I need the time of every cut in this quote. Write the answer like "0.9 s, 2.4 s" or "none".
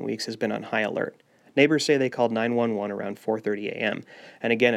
1.4 s